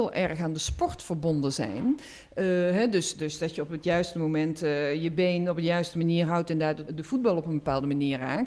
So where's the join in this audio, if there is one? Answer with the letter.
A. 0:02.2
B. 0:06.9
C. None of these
B